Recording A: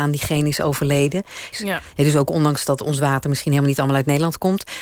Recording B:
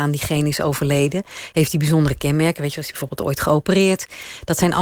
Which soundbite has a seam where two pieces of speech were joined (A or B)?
A